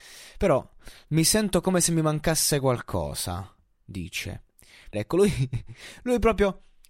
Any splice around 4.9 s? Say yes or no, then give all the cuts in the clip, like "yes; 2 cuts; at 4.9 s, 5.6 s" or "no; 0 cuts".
yes; 1 cut; at 4.9 s